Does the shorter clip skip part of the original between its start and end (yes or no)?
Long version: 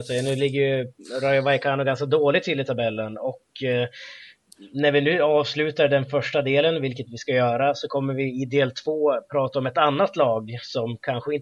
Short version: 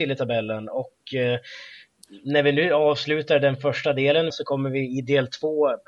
yes